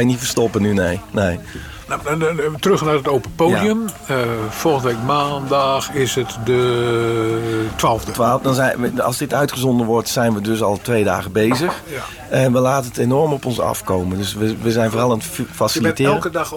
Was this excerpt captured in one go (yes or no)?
yes